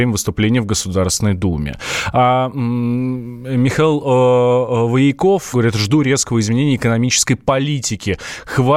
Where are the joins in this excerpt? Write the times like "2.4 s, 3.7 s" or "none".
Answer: 5.5 s